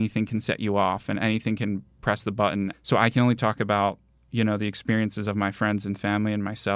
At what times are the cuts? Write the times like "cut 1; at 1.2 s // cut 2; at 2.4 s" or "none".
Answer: cut 1; at 2.7 s